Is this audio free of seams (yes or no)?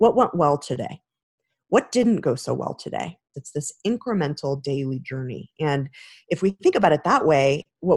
no